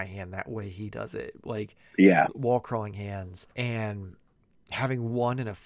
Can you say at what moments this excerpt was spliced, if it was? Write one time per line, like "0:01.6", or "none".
0:03.5